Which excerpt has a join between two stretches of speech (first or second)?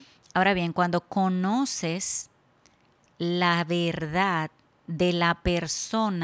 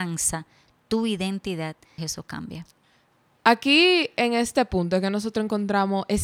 second